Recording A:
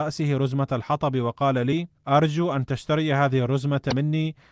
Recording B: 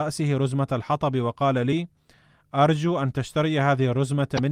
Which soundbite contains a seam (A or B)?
A